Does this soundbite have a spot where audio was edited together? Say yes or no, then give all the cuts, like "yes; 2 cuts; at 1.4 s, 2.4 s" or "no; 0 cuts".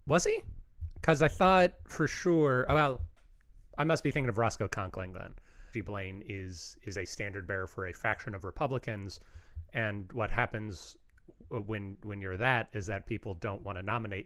yes; 1 cut; at 5.7 s